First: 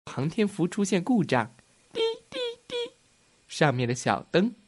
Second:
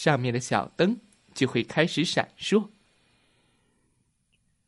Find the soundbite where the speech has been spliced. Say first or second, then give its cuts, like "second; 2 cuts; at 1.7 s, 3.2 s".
first; 1 cut; at 1.8 s